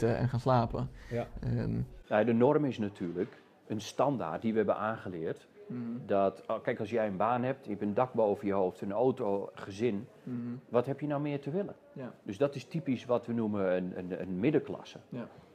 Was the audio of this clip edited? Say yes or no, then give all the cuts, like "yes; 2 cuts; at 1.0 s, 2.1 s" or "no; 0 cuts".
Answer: yes; 1 cut; at 13.9 s